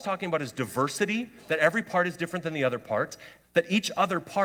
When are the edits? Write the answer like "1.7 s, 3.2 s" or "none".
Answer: 3.4 s